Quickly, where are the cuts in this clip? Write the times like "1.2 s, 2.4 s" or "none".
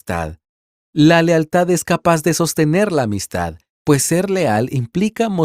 3.7 s

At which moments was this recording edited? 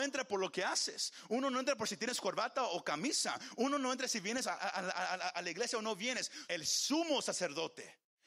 4.6 s, 6.5 s

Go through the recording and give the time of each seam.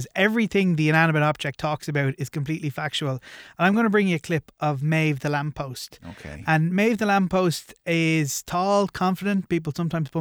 none

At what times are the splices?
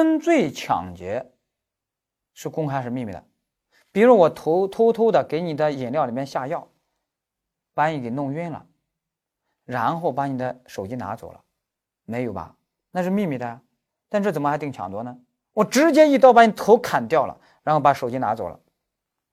11.8 s, 13.9 s, 15.4 s

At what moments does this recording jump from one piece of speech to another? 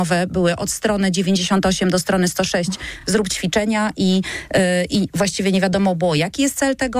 none

